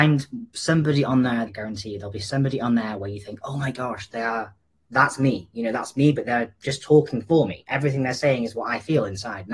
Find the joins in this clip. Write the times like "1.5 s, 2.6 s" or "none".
1.5 s